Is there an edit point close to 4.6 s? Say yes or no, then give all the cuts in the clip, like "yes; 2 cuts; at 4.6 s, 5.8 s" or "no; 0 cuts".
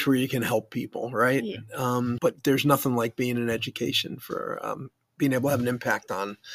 no; 1 cut; at 2.2 s